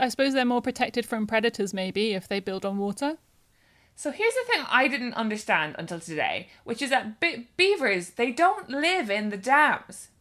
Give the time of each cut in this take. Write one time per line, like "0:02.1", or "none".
none